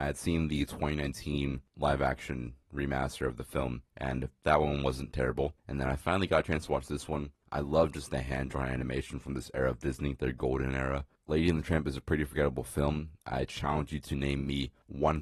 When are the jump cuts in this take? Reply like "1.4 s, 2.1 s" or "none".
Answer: 11.2 s